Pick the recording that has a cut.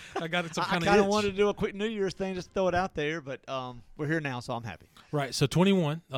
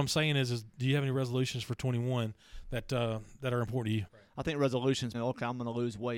second; 2 cuts; at 4.1 s, 5.1 s

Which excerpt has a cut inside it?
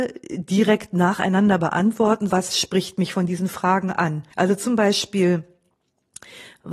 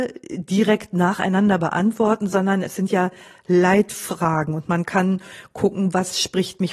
first; 2 cuts; at 2.3 s, 4.3 s

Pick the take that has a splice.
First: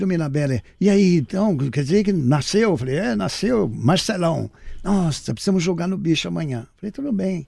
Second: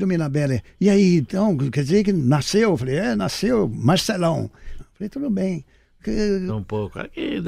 second; 2 cuts; at 4.8 s, 6.5 s

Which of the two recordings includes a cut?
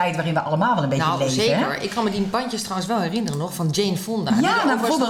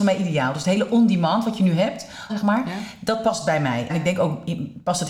second; 2 cuts; at 2.3 s, 3.9 s

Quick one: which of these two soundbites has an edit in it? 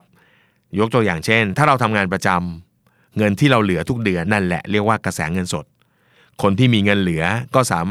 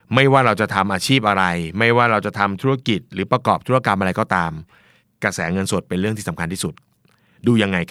first; 1 cut; at 4.2 s

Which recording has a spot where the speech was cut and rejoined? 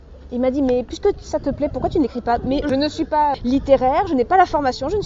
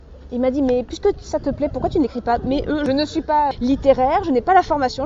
first; 1 cut; at 2.6 s

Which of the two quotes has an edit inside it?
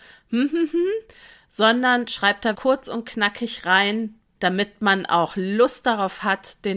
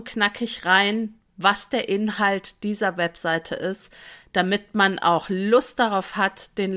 first; 2 cuts; at 2.5 s, 4.4 s

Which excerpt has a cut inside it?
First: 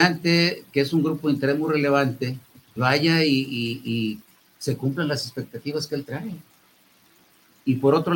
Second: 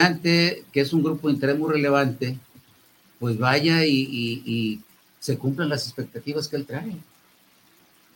first; 1 cut; at 2.8 s

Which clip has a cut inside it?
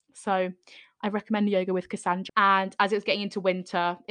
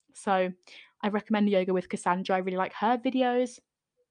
first; 1 cut; at 2.3 s

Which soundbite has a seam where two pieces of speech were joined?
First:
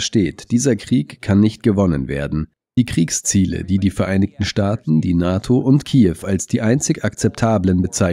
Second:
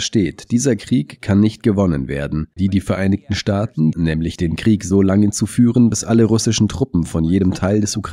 second; 2 cuts; at 2.6 s, 3.9 s

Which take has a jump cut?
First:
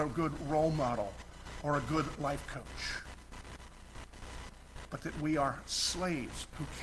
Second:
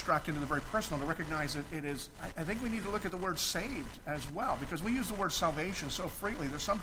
second; 1 cut; at 2.2 s

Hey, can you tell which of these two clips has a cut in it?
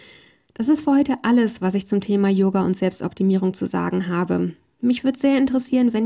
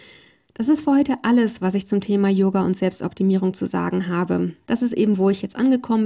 second; 1 cut; at 4.7 s

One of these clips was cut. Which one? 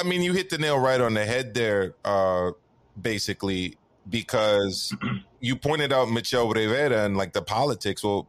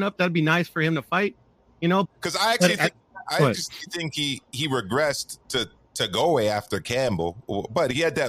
second; 1 cut; at 2.0 s

